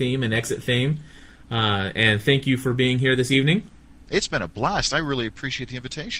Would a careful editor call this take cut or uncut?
uncut